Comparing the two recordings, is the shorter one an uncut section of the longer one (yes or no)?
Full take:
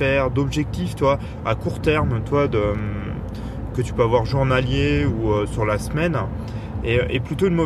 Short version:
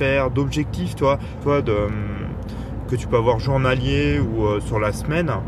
no